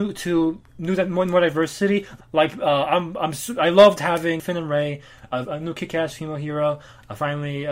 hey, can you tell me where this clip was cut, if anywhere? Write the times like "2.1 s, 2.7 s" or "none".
2.2 s, 5.4 s